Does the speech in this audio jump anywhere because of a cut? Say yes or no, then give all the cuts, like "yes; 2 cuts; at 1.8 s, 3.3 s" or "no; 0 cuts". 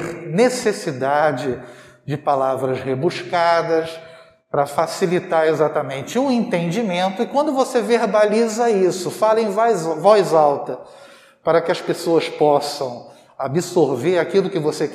no; 0 cuts